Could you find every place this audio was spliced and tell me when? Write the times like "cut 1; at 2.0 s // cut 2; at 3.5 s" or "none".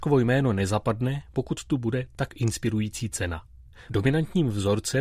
cut 1; at 3.9 s